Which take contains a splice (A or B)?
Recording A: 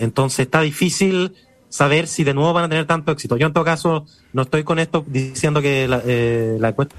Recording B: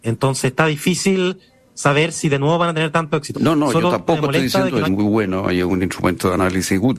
B